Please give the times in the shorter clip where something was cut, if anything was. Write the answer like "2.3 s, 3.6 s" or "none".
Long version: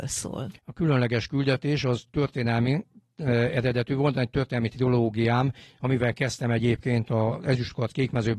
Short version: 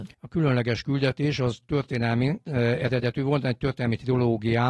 2.4 s